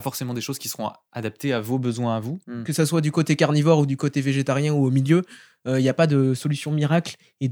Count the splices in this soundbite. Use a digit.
1